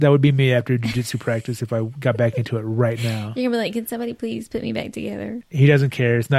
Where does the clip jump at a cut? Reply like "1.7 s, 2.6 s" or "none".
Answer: 5.4 s